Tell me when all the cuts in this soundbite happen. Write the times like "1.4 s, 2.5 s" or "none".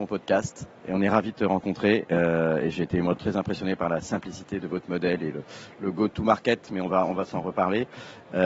none